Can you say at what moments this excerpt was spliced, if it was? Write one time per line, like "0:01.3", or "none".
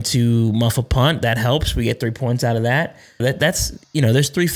0:03.2